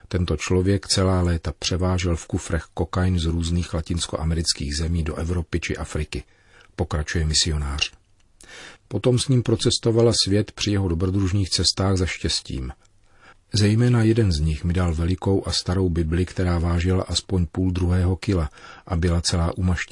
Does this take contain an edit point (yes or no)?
yes